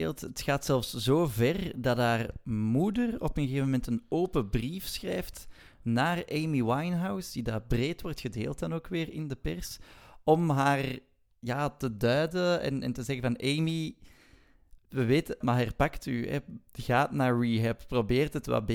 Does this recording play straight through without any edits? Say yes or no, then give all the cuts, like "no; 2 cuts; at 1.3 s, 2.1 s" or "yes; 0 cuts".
no; 1 cut; at 15.4 s